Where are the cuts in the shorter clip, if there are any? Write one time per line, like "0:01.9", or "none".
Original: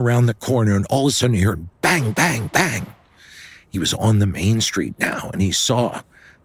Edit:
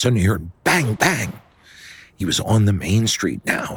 0:01.0